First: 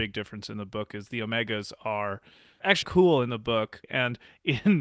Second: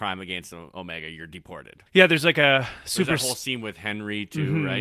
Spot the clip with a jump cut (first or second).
first